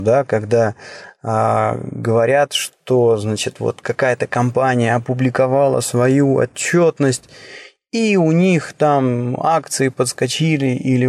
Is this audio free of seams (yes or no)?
yes